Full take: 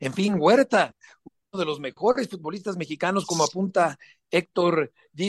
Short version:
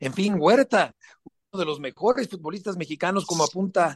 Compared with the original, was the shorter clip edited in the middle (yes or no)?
no